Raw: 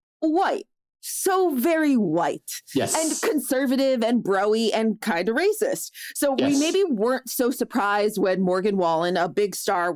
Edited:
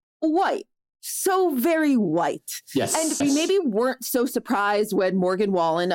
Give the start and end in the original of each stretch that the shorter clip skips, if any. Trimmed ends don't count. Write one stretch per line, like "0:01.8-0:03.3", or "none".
0:03.2-0:06.5